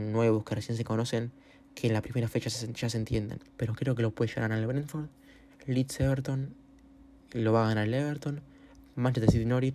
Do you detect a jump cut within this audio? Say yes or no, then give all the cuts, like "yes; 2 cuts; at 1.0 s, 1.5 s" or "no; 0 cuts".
yes; 1 cut; at 3.4 s